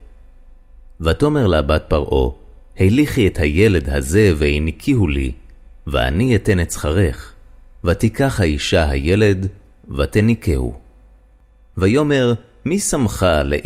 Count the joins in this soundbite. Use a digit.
1